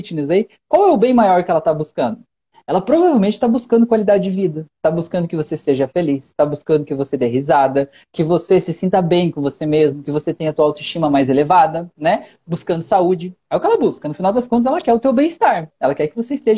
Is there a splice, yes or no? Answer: no